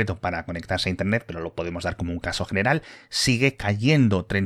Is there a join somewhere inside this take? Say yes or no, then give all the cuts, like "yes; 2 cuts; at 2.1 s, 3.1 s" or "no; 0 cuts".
no; 0 cuts